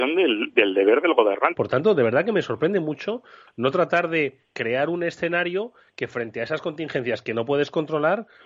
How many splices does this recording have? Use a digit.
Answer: 2